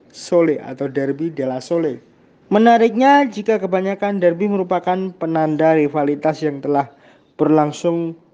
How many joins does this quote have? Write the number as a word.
one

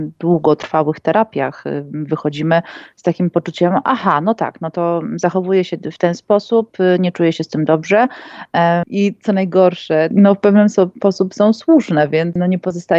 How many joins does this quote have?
two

